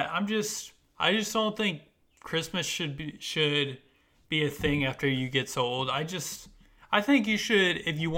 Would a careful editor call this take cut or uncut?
uncut